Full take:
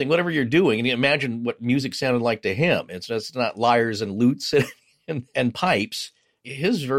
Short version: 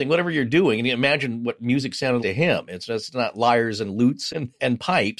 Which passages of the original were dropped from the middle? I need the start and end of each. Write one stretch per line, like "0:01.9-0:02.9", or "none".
0:02.2-0:02.4
0:04.5-0:05.0